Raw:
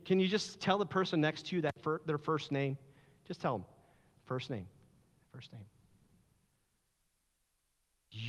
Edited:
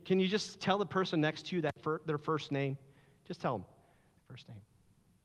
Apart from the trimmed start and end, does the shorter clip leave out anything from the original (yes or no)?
yes